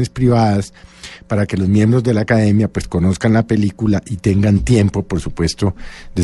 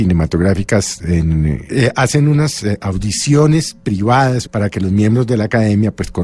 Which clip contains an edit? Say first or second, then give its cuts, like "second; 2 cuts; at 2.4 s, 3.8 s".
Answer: second; 2 cuts; at 1.7 s, 4.4 s